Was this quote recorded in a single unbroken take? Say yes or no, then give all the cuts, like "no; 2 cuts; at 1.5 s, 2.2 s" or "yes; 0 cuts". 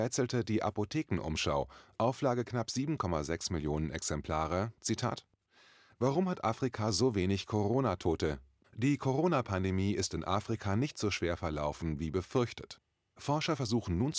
yes; 0 cuts